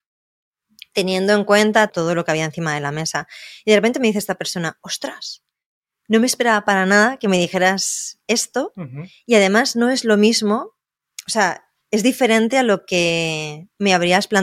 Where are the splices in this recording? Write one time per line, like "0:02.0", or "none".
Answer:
0:01.9